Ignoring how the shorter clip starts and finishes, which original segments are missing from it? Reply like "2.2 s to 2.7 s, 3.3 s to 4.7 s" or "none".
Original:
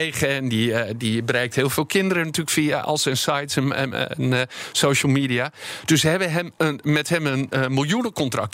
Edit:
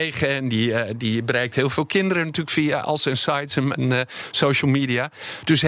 3.7 s to 4.1 s